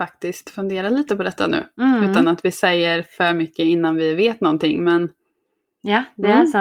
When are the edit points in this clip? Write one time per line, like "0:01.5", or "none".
none